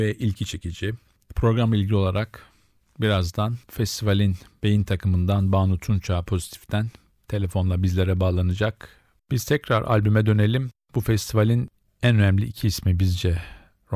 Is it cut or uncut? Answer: cut